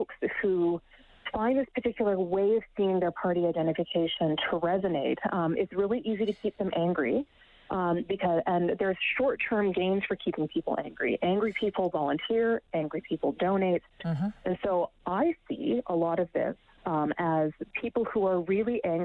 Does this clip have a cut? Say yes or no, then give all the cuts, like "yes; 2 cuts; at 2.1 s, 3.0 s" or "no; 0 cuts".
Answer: yes; 1 cut; at 14.0 s